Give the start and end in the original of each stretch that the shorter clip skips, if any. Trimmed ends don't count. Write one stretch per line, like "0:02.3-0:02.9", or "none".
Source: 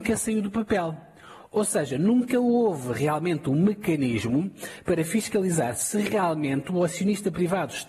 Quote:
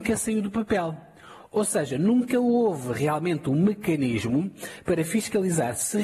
none